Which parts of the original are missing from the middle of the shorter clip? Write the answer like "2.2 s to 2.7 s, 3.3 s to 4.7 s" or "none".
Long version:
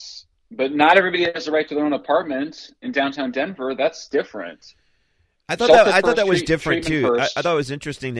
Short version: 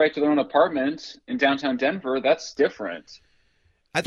none